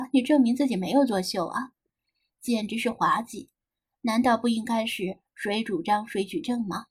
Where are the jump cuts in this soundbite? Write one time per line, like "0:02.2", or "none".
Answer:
none